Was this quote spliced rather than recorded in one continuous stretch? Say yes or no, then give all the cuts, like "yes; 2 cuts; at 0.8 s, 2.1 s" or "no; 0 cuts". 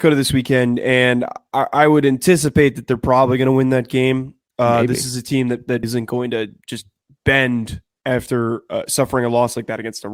yes; 1 cut; at 5.8 s